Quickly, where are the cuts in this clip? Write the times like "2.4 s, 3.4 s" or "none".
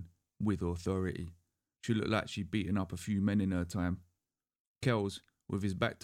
none